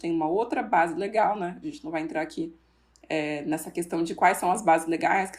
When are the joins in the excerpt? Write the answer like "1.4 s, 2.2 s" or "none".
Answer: none